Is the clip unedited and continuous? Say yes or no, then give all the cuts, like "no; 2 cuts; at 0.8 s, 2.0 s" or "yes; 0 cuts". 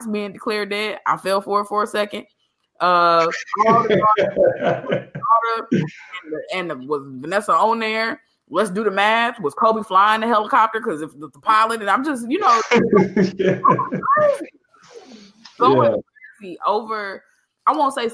yes; 0 cuts